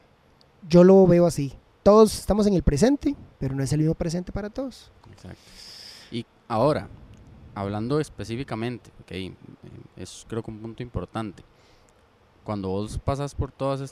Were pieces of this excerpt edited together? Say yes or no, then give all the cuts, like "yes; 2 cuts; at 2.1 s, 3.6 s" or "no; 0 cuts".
yes; 1 cut; at 3.3 s